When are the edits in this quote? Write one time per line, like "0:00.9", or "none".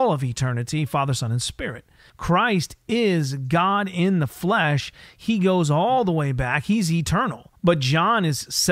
0:02.1
0:07.6